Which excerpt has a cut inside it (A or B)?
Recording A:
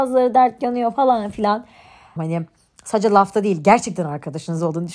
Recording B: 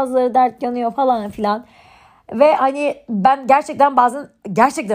A